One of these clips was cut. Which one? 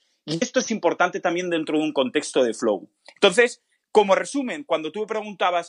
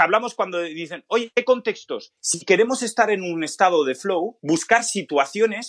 second; 2 cuts; at 2.2 s, 4.4 s

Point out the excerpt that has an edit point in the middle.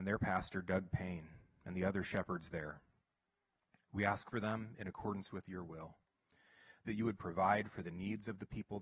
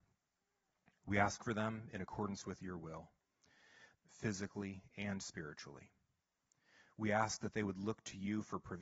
second; 1 cut; at 3.9 s

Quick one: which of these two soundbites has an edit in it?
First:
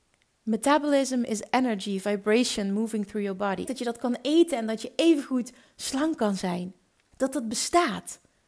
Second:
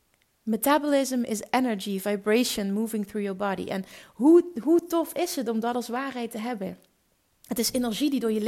first; 2 cuts; at 3.6 s, 7.1 s

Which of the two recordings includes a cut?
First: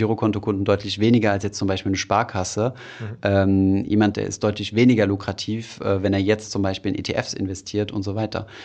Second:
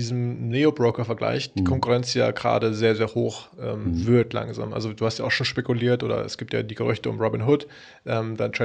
first; 1 cut; at 4.1 s

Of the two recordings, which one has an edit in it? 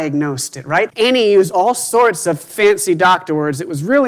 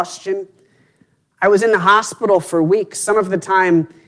first; 1 cut; at 0.9 s

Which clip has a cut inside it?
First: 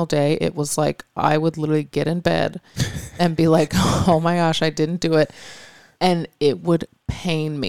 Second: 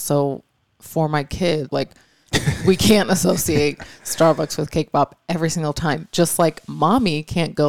second; 1 cut; at 1.7 s

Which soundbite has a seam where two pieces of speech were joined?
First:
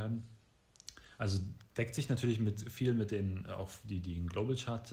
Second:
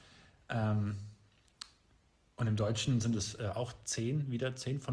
first; 1 cut; at 1.7 s

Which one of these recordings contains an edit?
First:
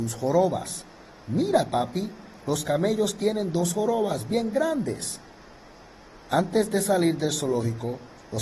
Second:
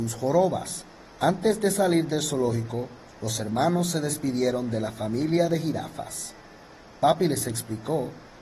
second; 1 cut; at 1.1 s

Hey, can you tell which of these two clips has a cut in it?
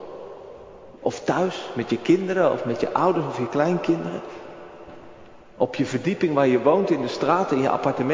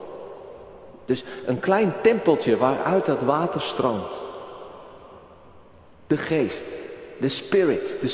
first; 1 cut; at 1.0 s

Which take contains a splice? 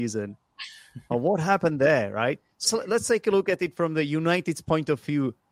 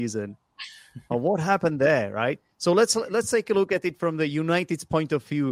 first; 1 cut; at 2.6 s

